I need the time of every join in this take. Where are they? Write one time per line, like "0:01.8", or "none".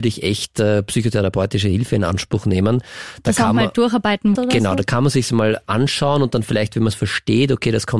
0:04.4